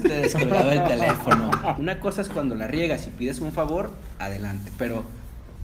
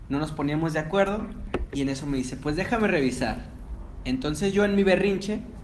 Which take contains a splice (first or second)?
first